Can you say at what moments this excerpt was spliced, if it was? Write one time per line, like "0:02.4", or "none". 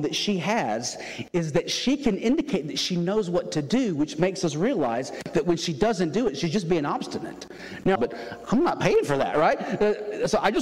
0:08.0